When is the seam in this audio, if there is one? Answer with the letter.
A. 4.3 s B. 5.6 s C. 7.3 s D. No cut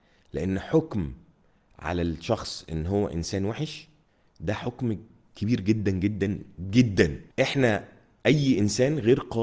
C